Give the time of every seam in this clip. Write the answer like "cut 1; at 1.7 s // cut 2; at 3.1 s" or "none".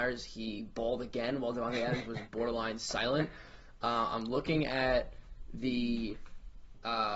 none